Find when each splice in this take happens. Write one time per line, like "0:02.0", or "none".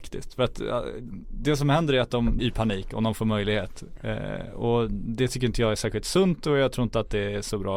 0:02.4